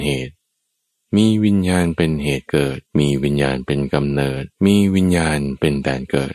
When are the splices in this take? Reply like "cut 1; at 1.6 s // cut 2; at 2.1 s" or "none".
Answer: cut 1; at 2.9 s // cut 2; at 4.5 s